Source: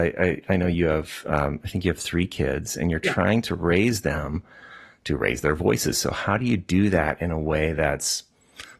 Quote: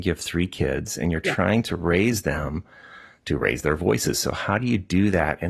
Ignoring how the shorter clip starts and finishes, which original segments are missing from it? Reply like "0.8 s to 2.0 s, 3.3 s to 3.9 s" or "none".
none